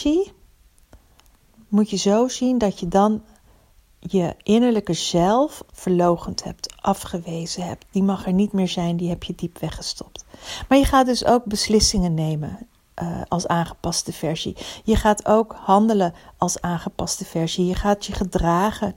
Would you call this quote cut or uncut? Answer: cut